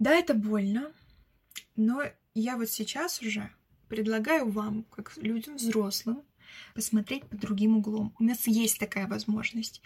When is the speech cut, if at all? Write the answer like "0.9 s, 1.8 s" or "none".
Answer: 3.8 s, 6.7 s

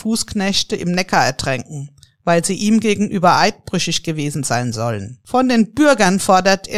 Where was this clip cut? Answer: none

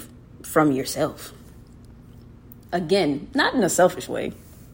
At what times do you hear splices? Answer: 2.6 s

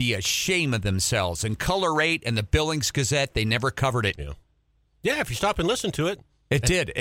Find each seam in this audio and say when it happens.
4.2 s

